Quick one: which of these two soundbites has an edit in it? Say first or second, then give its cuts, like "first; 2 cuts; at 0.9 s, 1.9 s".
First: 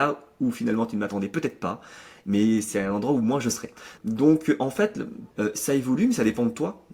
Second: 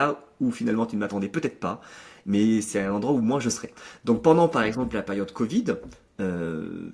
first; 2 cuts; at 4.0 s, 5.3 s